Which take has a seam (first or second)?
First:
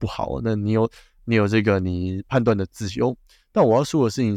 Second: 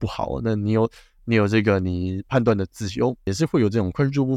second